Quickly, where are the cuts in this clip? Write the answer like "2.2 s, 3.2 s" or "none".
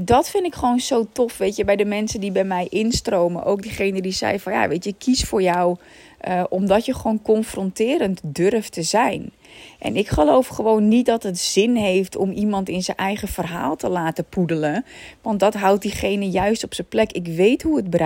none